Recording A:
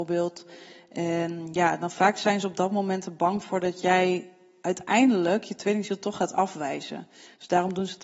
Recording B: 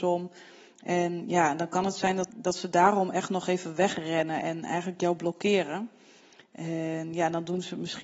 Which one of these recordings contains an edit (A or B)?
B